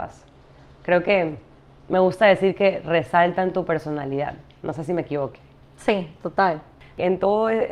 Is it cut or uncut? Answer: uncut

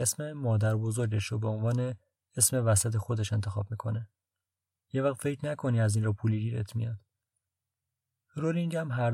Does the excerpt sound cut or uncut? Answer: cut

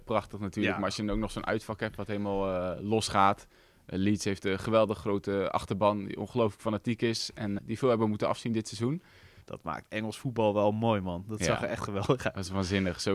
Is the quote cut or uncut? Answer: cut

